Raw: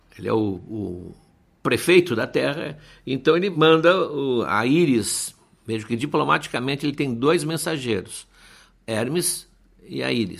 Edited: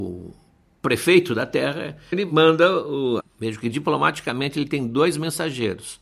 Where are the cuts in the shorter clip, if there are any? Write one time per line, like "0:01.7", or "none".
0:02.1
0:03.2